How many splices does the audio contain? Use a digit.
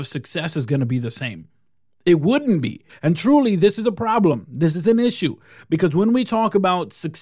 1